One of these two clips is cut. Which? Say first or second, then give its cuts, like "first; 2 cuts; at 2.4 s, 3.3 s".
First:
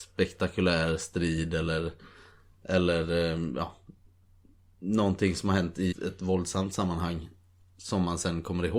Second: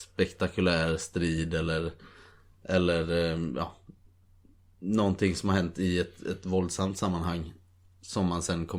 first; 1 cut; at 5.9 s